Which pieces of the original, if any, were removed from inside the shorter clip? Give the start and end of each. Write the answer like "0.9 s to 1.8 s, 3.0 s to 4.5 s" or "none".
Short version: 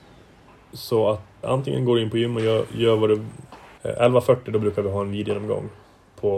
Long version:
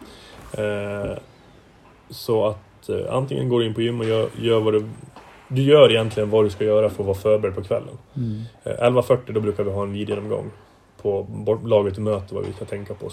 2.8 s to 3.1 s, 5.4 s to 8.6 s